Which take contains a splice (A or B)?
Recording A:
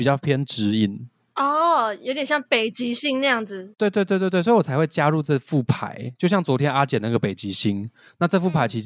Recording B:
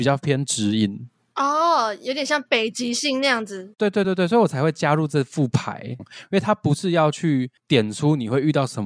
B